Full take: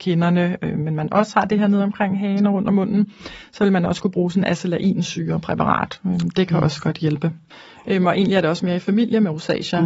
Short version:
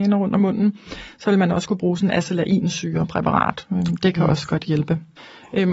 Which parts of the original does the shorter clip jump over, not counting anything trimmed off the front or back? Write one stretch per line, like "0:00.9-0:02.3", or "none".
none

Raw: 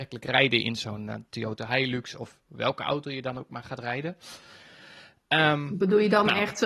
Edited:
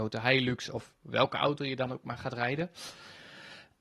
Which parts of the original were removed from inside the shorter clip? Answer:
none

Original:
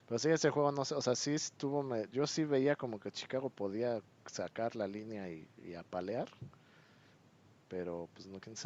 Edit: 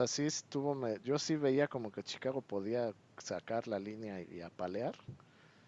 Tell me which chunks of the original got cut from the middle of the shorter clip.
0:05.3-0:05.5

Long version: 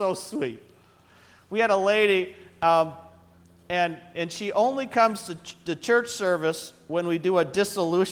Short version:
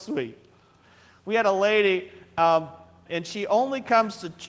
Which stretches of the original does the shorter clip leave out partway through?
0:03.3-0:04.1

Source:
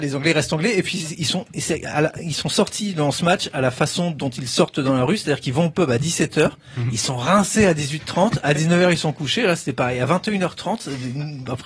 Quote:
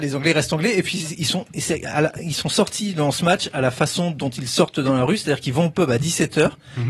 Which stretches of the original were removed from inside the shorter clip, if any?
none

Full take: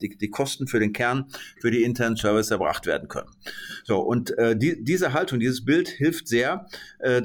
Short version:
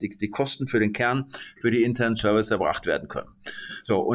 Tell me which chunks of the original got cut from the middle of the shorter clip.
none

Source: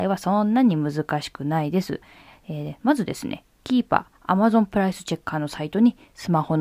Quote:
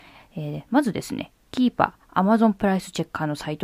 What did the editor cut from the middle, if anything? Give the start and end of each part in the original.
none

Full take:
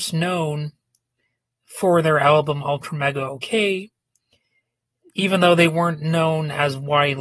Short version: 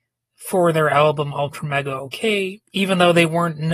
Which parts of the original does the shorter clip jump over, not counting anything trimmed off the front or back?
0:04.0-0:05.1

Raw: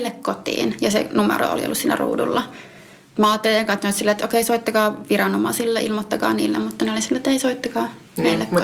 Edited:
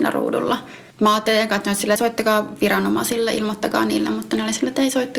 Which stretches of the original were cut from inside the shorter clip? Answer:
0:02.8-0:03.1
0:04.1-0:04.4

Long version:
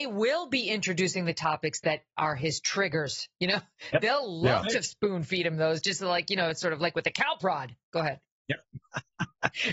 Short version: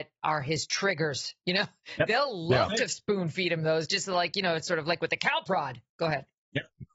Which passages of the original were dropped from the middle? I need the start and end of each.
none

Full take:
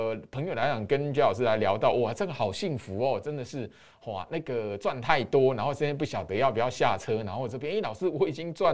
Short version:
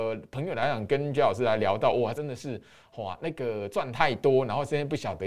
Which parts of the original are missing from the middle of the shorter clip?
0:02.1-0:03.2

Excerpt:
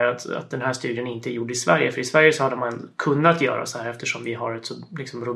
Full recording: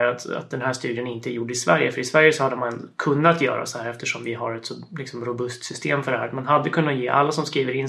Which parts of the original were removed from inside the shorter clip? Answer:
none

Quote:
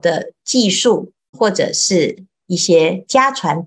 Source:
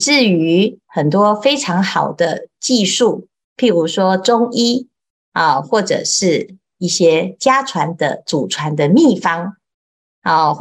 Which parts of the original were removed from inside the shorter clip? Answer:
0:03.5-0:05.6

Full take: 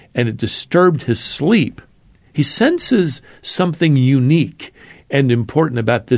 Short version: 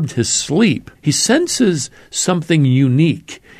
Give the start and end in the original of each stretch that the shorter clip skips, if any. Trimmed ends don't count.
0:01.9-0:02.3

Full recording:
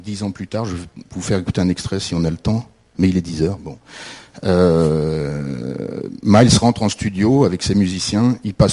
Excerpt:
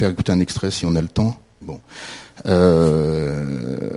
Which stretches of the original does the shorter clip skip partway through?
0:02.9-0:03.6

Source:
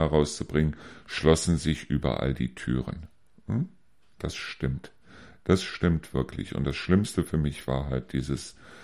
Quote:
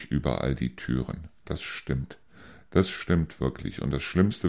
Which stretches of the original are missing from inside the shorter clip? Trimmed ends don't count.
0:03.1-0:04.1

